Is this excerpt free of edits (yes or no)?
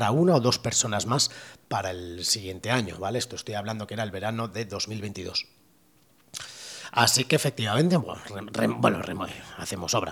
no